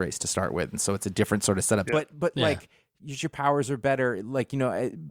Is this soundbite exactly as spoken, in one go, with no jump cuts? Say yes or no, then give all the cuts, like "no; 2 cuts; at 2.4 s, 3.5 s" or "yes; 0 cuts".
no; 2 cuts; at 1.9 s, 3.2 s